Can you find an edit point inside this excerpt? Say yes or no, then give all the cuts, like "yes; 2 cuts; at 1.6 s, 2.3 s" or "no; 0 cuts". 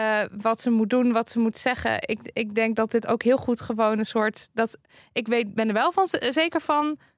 no; 0 cuts